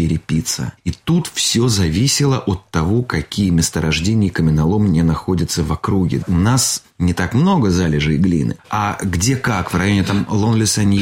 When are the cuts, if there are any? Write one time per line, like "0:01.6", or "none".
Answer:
none

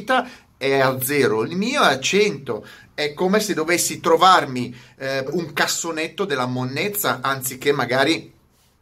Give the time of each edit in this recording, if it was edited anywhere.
0:05.3

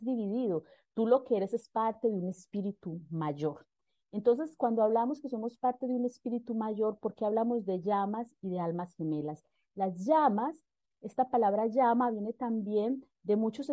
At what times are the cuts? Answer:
none

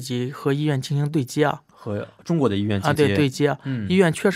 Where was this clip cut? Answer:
0:02.9

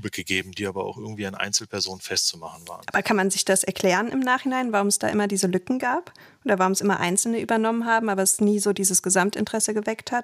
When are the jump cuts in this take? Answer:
none

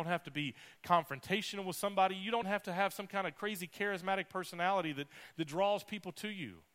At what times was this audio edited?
0:02.4

